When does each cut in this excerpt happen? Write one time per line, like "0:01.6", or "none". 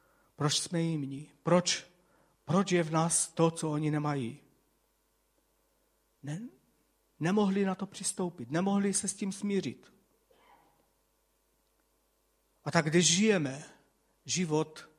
0:06.1